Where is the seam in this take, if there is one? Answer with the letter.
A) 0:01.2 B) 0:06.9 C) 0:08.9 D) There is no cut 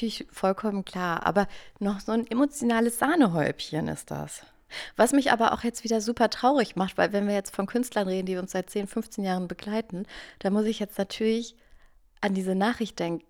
D